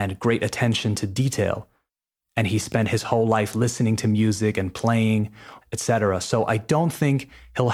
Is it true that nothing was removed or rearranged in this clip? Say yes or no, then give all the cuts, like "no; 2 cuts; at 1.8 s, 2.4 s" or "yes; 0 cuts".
no; 1 cut; at 5.6 s